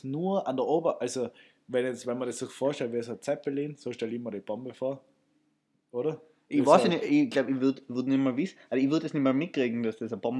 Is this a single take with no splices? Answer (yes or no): yes